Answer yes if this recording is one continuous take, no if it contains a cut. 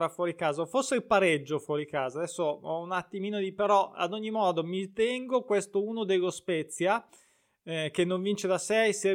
yes